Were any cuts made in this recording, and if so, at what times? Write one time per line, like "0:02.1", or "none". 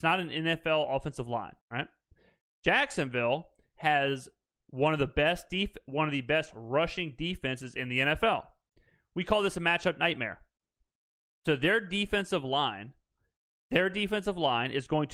0:01.6